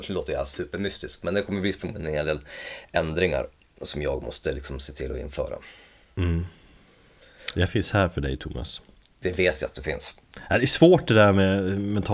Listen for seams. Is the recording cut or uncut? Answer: uncut